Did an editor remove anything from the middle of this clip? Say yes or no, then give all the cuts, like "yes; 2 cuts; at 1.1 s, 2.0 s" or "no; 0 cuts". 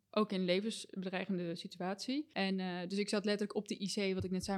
no; 0 cuts